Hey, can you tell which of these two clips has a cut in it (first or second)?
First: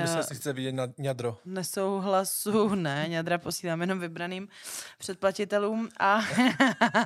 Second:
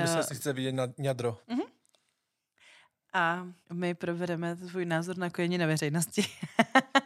second